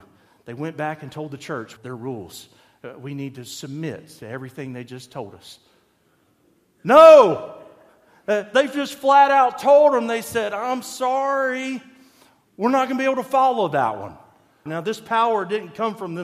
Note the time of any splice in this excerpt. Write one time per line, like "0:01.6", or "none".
0:01.8
0:14.7